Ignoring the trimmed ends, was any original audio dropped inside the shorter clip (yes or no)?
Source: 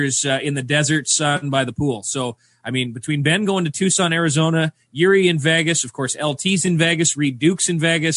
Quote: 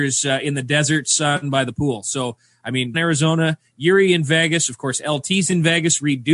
yes